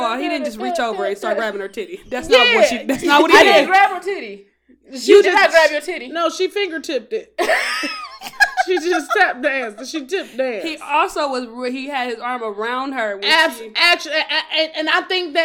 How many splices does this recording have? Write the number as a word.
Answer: zero